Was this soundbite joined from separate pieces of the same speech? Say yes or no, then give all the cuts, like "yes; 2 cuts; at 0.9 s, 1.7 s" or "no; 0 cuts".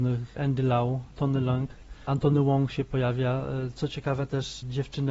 no; 0 cuts